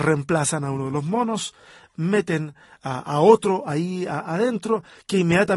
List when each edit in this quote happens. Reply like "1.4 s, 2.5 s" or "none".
none